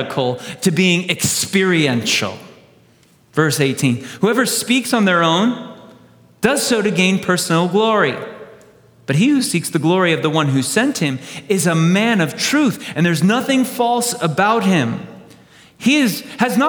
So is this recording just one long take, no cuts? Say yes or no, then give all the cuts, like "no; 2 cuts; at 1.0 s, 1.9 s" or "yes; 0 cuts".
yes; 0 cuts